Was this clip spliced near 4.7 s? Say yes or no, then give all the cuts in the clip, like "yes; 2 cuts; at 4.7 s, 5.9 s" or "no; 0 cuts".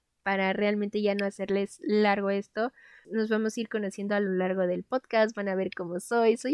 no; 1 cut; at 3.0 s